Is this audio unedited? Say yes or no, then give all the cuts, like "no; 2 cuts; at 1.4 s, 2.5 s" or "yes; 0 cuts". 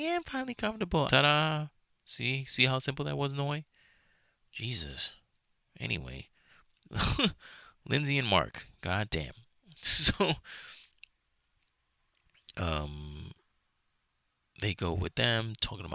no; 1 cut; at 1.1 s